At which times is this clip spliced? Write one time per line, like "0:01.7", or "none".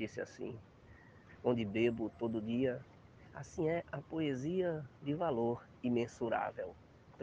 0:01.2

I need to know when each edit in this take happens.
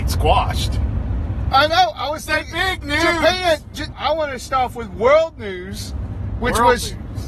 0:01.5
0:03.9

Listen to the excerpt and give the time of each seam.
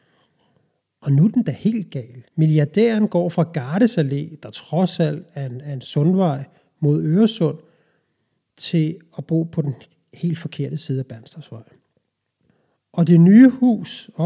0:02.3

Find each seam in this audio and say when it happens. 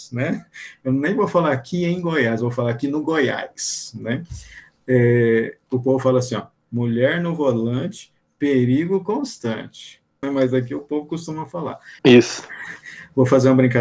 0:10.2
0:12.0

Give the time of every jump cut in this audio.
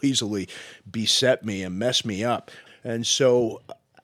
0:02.7

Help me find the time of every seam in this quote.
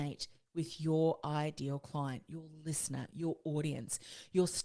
none

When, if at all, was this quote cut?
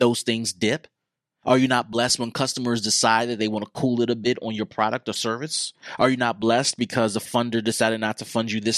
0:01.4

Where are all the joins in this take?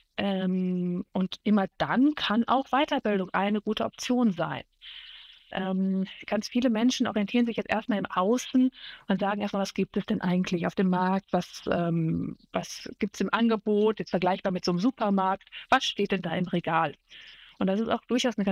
0:05.5

